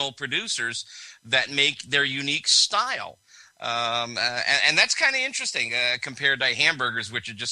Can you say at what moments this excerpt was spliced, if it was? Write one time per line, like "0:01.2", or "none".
none